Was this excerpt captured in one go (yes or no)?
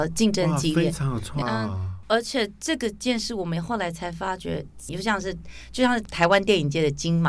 no